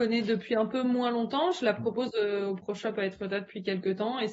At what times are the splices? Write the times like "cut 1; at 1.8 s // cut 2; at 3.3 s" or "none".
none

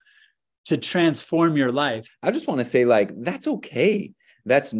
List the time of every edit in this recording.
cut 1; at 2.1 s

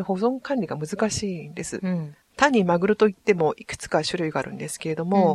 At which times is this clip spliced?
cut 1; at 2.3 s

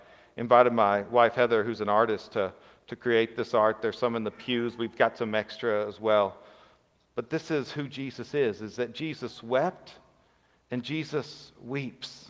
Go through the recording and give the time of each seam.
none

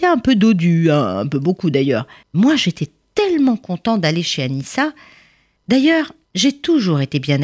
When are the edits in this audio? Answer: cut 1; at 2.2 s

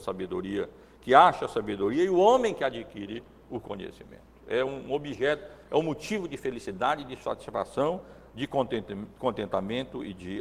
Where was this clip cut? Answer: none

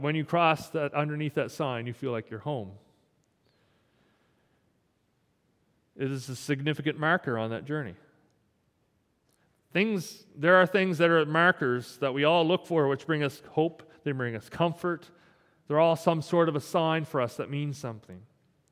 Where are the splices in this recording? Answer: none

